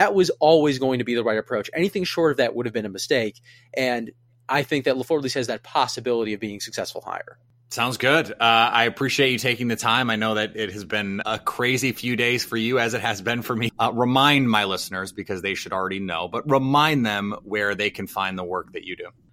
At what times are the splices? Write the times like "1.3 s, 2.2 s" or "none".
11.2 s, 13.7 s